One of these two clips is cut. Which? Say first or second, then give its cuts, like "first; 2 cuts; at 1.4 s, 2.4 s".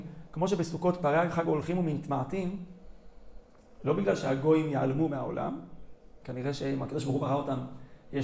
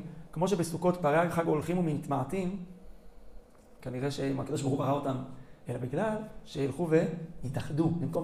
second; 2 cuts; at 3.8 s, 5.6 s